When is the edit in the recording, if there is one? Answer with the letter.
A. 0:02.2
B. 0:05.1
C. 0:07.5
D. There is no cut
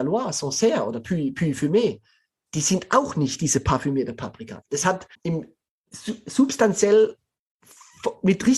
B